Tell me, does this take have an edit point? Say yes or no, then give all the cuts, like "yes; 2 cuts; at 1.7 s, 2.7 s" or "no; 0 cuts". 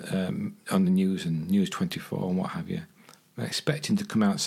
no; 0 cuts